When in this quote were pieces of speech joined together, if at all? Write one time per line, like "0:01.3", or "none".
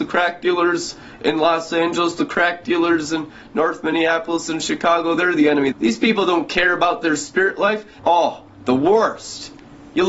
0:05.7
0:08.0

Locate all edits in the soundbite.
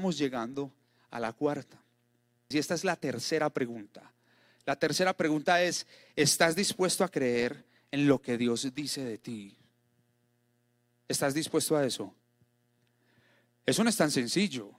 0:02.5

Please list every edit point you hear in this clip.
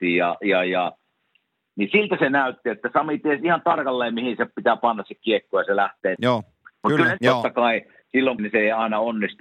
0:06.2
0:07.2
0:08.4

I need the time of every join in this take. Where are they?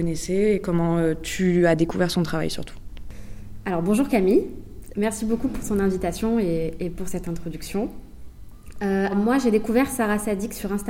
0:09.1

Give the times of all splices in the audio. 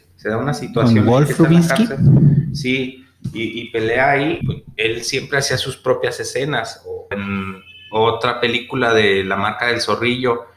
0:04.4
0:07.1

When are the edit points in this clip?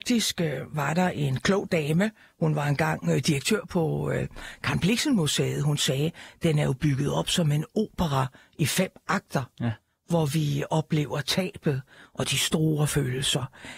none

